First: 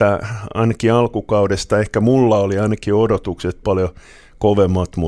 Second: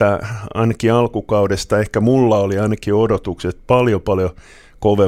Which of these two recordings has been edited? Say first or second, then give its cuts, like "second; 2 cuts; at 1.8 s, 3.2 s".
first; 1 cut; at 3.6 s